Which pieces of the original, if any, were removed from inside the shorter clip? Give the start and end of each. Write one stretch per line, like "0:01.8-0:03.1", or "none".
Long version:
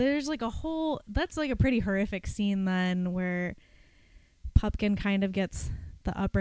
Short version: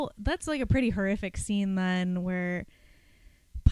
none